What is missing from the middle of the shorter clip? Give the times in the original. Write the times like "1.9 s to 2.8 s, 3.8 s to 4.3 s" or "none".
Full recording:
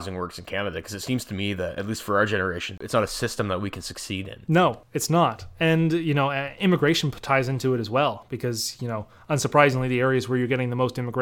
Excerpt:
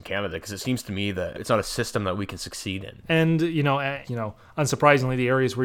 1.8 s to 2.8 s, 4.5 s to 5.5 s, 6.6 s to 8.8 s